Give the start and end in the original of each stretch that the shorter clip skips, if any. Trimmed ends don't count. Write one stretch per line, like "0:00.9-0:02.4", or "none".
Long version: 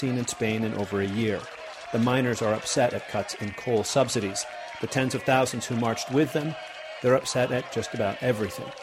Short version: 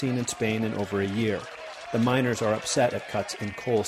none